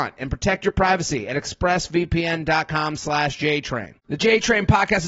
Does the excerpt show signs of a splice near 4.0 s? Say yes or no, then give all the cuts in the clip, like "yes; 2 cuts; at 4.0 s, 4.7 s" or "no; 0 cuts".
yes; 1 cut; at 4.0 s